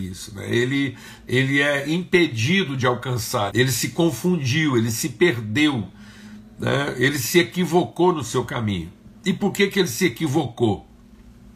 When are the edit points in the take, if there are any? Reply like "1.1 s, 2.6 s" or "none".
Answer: 3.5 s